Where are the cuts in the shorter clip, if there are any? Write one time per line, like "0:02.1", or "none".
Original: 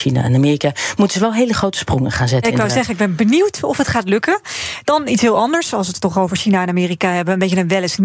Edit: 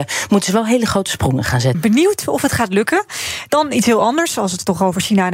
0:01.7